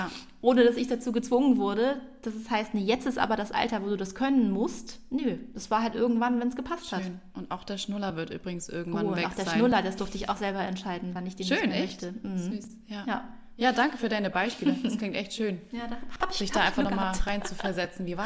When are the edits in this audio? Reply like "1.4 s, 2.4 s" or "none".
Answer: none